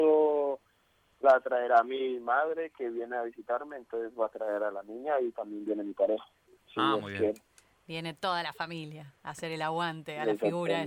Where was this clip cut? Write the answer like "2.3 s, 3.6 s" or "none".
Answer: none